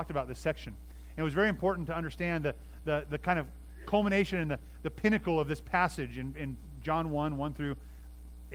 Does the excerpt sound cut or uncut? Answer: uncut